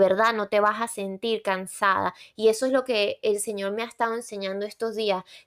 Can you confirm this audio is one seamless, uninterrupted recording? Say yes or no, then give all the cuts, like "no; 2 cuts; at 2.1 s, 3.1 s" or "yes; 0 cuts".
yes; 0 cuts